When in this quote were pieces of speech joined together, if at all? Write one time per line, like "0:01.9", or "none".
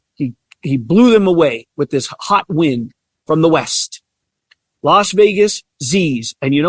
none